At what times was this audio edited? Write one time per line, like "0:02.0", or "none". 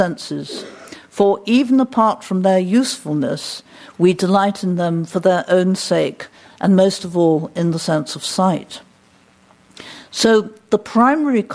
none